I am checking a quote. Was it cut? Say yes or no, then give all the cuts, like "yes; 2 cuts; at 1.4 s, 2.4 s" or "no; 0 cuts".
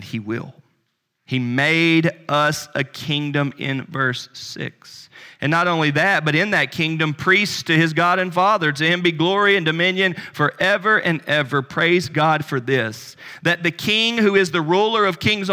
yes; 1 cut; at 1.2 s